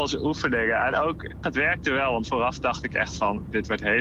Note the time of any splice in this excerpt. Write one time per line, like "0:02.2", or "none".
0:01.4